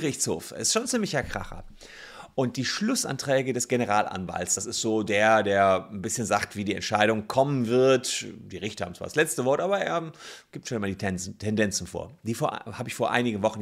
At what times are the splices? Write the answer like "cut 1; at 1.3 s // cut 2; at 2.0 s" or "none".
none